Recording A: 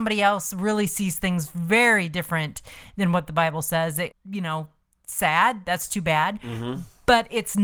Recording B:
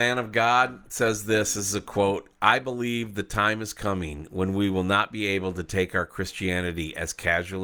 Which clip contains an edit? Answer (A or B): A